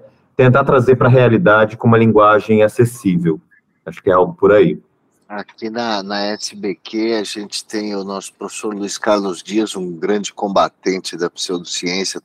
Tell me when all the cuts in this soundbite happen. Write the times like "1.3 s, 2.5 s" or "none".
none